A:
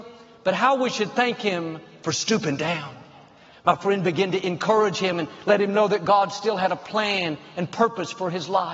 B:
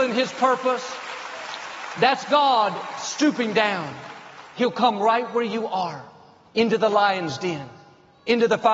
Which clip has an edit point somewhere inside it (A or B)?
A